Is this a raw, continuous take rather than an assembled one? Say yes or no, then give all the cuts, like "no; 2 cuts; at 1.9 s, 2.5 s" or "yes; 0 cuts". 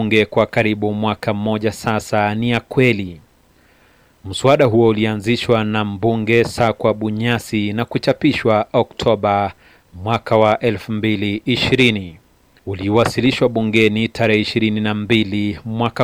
yes; 0 cuts